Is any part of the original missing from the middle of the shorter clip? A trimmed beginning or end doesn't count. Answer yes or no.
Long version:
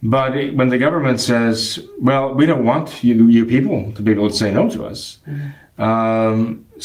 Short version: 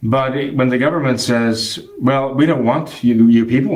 no